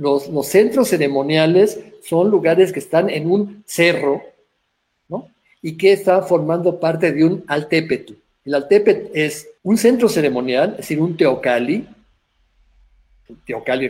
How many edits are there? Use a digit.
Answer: 1